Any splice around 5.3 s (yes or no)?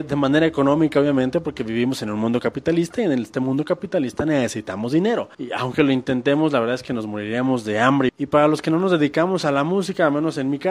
yes